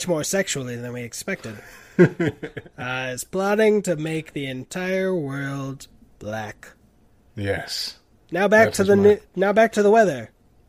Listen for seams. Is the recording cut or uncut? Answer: uncut